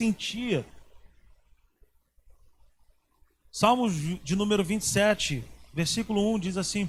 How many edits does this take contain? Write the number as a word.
zero